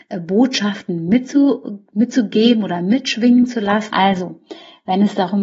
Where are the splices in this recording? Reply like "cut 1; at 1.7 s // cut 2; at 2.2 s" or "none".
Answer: cut 1; at 1.9 s // cut 2; at 3.9 s